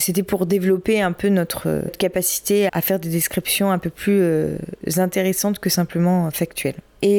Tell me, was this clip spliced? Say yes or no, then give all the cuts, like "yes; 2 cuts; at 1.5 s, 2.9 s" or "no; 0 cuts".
yes; 1 cut; at 2.7 s